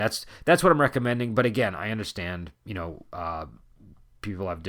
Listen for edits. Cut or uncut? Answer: uncut